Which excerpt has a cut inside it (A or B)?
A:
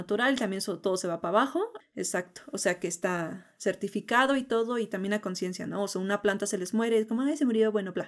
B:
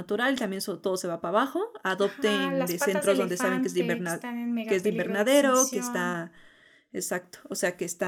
A